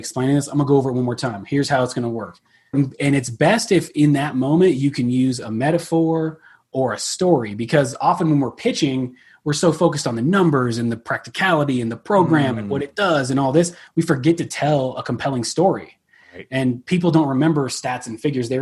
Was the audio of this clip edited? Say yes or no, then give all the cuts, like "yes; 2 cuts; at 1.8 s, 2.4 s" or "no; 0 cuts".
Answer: yes; 1 cut; at 2.7 s